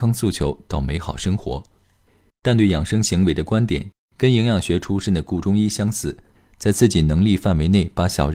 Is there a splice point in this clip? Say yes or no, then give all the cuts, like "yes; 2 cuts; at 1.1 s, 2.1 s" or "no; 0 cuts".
yes; 2 cuts; at 2.3 s, 6.3 s